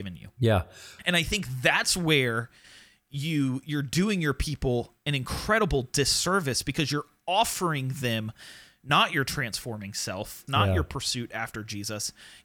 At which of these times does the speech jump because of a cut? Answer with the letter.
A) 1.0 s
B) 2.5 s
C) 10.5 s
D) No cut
C